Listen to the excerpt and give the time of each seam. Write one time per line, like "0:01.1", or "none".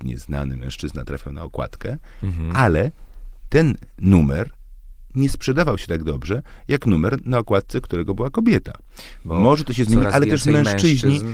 0:09.2